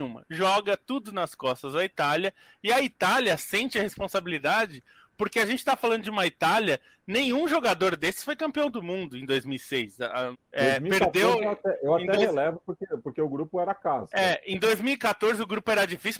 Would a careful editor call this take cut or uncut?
cut